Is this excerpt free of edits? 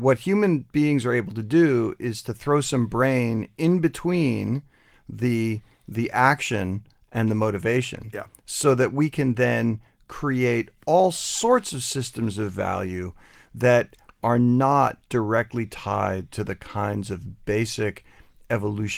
yes; 0 cuts

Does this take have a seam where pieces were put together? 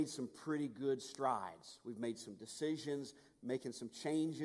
no; 0 cuts

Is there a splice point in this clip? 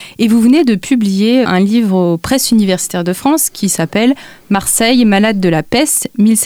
yes; 1 cut; at 1.4 s

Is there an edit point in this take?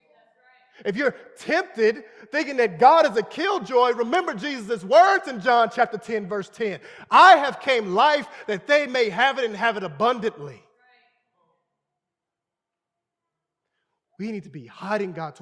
no; 0 cuts

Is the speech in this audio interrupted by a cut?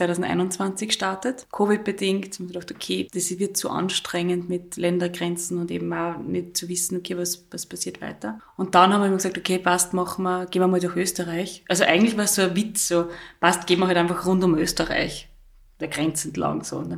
no; 0 cuts

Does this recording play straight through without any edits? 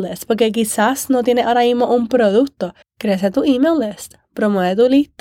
no; 1 cut; at 2.8 s

